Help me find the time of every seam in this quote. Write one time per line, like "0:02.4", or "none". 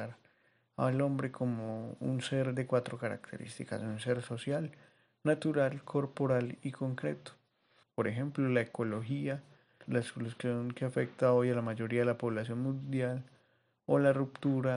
0:07.8
0:09.9